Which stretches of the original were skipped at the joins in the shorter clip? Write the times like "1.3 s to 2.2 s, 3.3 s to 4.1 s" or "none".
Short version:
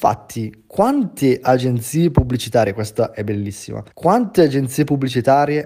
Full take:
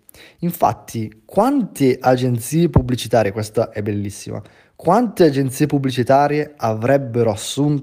4.5 s to 4.7 s